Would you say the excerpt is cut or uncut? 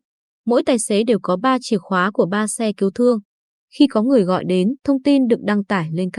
uncut